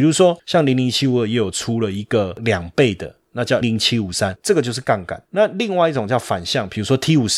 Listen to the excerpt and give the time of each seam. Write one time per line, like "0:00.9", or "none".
0:03.6